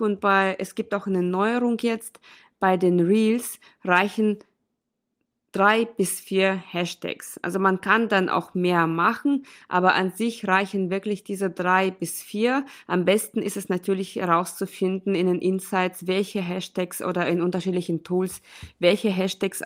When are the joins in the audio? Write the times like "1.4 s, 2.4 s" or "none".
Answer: none